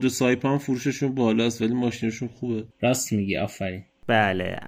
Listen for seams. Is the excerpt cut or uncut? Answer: cut